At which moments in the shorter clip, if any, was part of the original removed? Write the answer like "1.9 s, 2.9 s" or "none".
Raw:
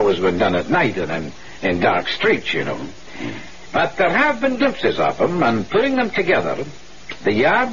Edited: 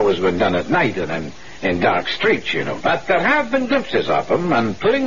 2.8 s